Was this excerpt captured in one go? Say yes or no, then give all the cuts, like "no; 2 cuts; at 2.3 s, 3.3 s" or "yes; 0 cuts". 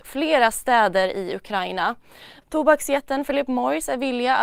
no; 1 cut; at 2.4 s